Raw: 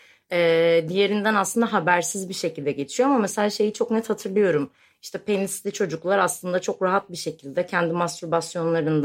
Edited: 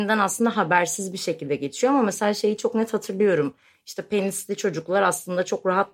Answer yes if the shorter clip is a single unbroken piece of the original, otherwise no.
yes